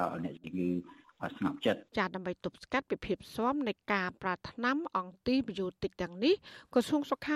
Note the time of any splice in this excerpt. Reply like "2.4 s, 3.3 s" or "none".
1.9 s